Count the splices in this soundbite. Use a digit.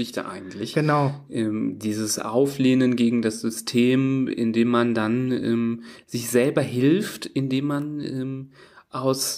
0